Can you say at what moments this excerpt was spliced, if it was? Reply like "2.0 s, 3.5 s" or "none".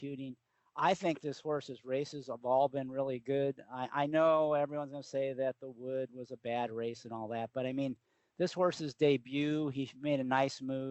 none